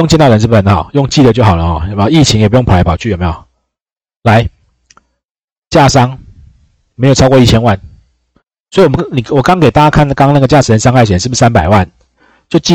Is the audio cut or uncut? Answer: cut